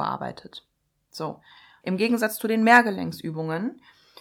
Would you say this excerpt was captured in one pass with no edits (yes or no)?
no